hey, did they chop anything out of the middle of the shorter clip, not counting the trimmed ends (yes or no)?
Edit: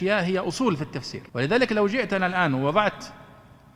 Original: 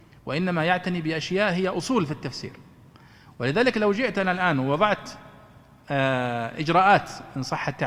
yes